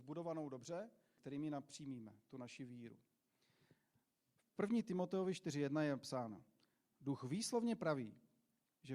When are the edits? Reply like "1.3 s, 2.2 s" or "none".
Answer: 1.2 s, 4.4 s